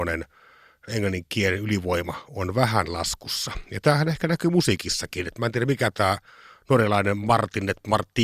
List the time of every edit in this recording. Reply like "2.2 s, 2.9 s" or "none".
none